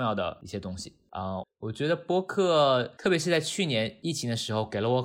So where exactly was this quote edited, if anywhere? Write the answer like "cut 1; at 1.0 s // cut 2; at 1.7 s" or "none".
cut 1; at 1.4 s